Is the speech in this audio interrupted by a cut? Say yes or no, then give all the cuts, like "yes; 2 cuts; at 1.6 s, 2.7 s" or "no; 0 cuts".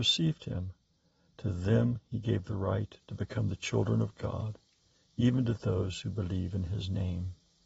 no; 0 cuts